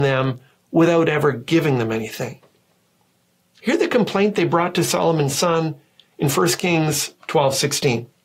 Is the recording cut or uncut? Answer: uncut